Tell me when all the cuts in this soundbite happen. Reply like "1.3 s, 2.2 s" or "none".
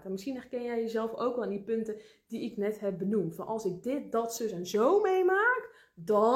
none